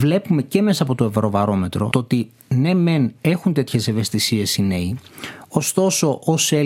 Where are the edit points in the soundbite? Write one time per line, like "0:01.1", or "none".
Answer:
0:01.9